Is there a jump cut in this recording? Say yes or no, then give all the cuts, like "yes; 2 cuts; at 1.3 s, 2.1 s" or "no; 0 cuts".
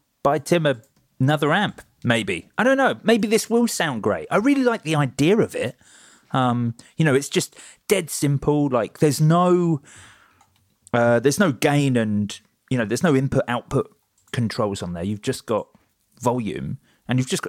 no; 0 cuts